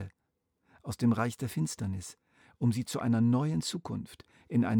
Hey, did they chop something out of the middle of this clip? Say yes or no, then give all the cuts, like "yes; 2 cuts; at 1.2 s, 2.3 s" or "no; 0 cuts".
no; 0 cuts